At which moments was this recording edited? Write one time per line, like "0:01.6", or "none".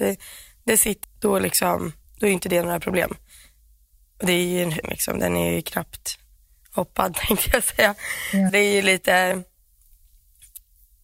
0:01.0
0:04.8
0:08.5